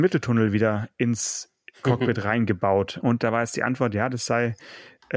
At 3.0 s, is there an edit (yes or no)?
yes